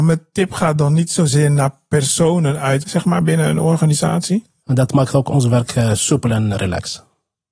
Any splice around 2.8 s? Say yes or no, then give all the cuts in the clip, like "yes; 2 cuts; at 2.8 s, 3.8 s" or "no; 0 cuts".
yes; 3 cuts; at 2.8 s, 4.6 s, 6.5 s